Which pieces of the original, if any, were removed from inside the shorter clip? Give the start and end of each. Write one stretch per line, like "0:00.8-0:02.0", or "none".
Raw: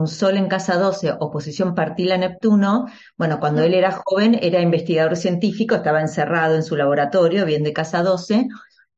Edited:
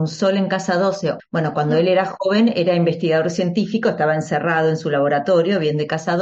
0:01.2-0:03.1